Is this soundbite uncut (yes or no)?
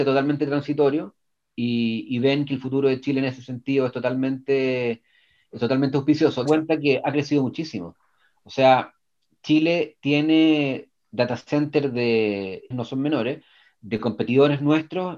no